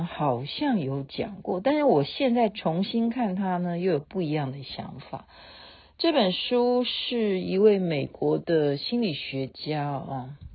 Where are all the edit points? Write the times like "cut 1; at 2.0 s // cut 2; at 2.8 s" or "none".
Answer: none

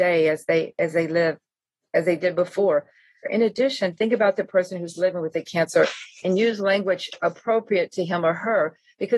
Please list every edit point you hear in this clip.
cut 1; at 3.2 s

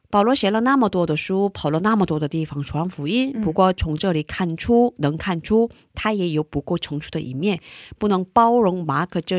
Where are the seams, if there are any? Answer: none

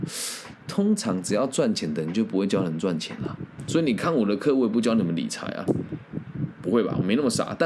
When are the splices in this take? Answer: none

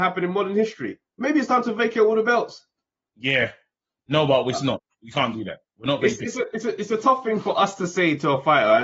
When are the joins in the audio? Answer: cut 1; at 1.1 s

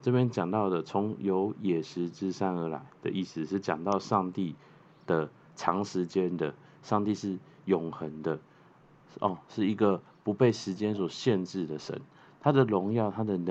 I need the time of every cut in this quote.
none

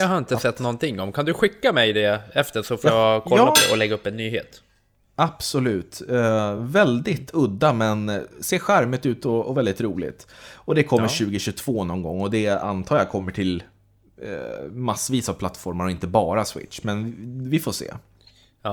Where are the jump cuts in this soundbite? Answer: none

